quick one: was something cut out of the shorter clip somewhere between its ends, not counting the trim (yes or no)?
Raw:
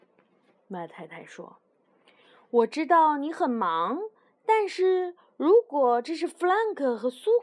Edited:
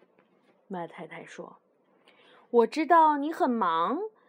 no